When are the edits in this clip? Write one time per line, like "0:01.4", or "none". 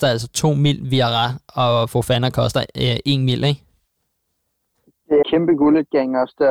0:05.2